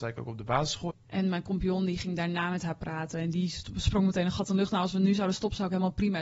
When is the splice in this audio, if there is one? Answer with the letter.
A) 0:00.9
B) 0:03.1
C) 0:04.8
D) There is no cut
A